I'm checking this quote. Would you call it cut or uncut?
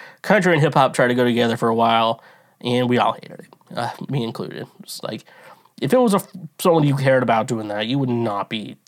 cut